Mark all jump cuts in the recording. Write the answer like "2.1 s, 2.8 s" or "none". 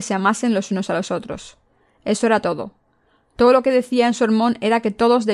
none